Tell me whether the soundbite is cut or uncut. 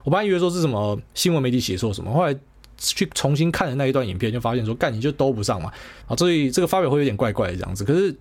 cut